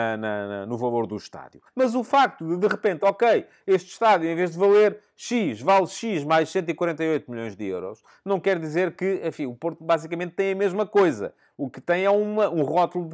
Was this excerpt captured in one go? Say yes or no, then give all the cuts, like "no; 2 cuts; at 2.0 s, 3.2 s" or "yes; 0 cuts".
no; 2 cuts; at 1.7 s, 3.0 s